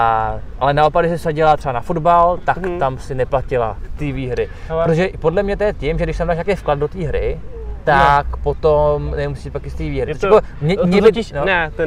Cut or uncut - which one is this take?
uncut